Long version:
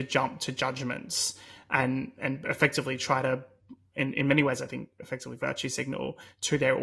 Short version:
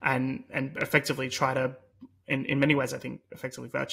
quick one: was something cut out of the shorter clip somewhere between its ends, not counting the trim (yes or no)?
no